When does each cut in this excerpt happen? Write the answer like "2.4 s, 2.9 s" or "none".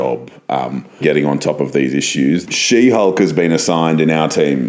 1.0 s, 2.4 s